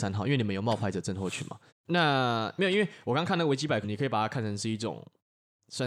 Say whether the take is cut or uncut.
cut